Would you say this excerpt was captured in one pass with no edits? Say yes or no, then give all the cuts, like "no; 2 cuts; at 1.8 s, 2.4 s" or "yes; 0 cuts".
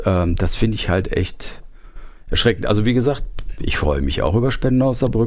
yes; 0 cuts